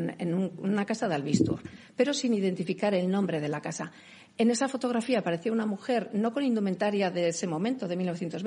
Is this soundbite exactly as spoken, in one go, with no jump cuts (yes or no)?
yes